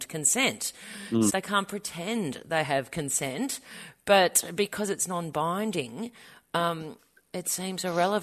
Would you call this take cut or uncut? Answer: cut